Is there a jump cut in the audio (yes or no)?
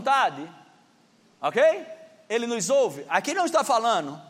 no